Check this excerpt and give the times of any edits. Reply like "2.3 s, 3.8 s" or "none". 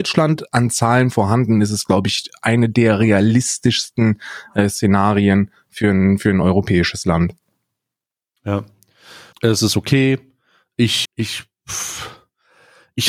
9.3 s, 11.0 s